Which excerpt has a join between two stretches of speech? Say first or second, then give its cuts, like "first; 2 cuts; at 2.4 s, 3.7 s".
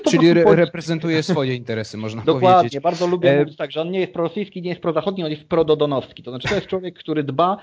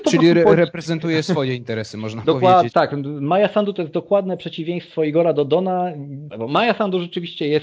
second; 2 cuts; at 2.7 s, 6.3 s